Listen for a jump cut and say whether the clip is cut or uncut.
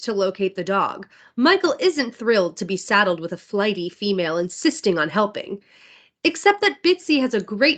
uncut